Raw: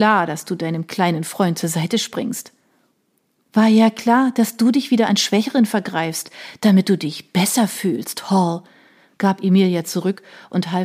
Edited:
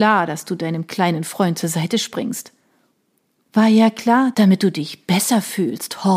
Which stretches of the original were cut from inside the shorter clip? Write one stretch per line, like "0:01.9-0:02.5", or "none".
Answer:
0:04.3-0:06.6

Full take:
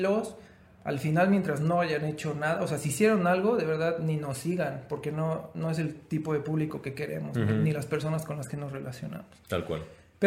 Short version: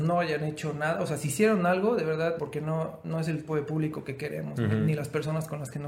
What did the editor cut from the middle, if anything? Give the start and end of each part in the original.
0:04.0-0:04.9
0:06.0-0:06.2

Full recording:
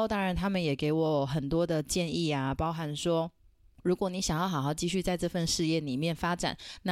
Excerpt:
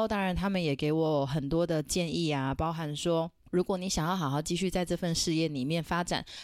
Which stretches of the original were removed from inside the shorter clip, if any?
0:03.4-0:03.7

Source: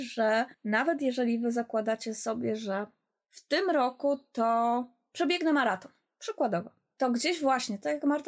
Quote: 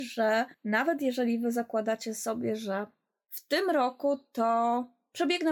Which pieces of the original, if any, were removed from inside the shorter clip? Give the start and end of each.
none

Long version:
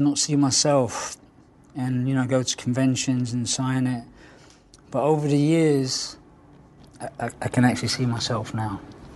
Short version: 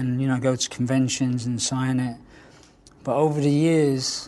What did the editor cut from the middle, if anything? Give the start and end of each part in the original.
none

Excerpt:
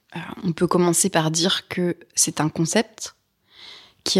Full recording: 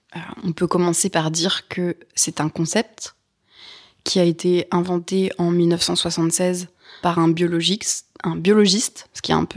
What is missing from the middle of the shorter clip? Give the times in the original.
none

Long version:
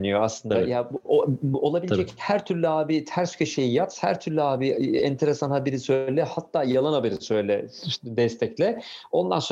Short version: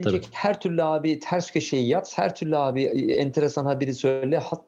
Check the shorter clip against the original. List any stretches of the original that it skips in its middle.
none

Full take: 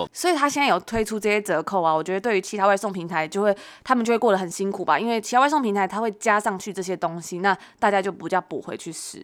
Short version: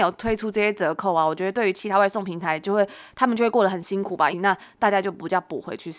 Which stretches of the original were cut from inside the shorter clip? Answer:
0:05.0-0:07.3

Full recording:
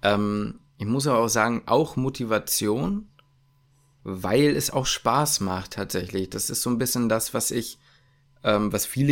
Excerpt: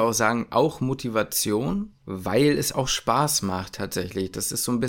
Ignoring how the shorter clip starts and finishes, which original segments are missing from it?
0:03.1-0:03.9

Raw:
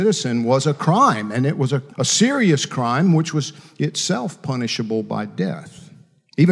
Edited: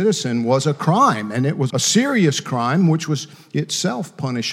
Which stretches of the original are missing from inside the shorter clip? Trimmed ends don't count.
0:01.7-0:01.9

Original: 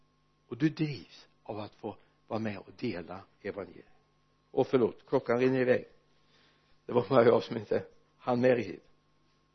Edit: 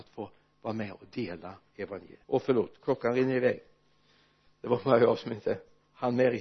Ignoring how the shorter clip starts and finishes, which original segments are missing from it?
0:03.9-0:04.5

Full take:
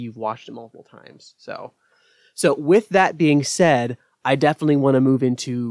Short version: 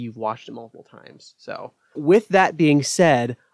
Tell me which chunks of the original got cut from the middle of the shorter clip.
0:02.0-0:02.6

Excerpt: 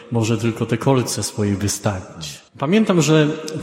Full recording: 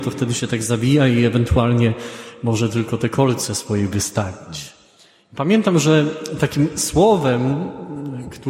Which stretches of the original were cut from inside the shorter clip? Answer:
0:04.8-0:05.3

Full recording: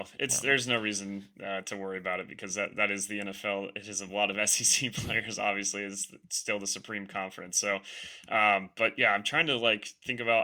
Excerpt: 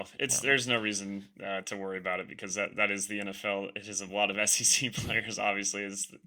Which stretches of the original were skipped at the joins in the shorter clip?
none

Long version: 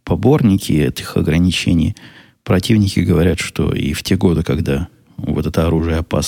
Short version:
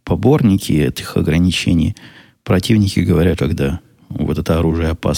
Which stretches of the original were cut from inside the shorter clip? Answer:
0:03.4-0:04.4

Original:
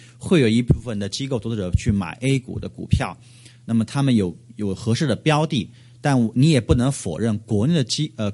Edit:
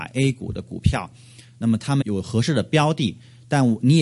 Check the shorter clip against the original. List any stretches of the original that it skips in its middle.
0:04.1-0:04.5

